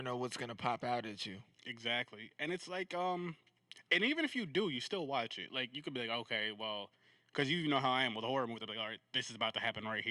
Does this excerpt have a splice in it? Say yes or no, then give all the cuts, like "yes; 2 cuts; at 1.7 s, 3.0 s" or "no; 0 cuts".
no; 0 cuts